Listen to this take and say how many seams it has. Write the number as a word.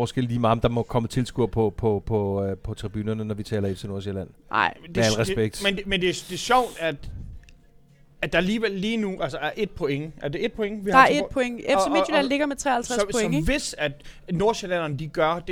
zero